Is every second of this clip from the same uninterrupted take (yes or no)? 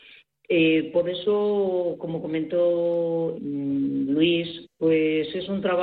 no